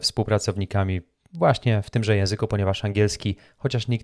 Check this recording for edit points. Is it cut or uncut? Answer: uncut